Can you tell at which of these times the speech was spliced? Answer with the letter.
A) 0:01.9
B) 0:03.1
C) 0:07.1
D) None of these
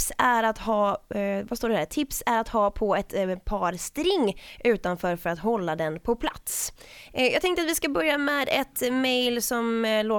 C